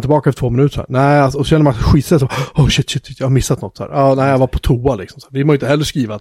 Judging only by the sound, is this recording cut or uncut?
uncut